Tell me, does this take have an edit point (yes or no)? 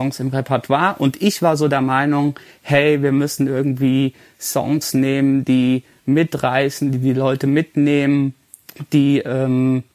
no